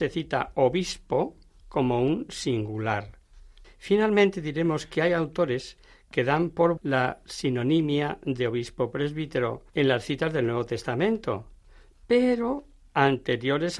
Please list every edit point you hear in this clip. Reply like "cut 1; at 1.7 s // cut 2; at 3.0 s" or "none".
cut 1; at 3.6 s // cut 2; at 6.8 s // cut 3; at 9.7 s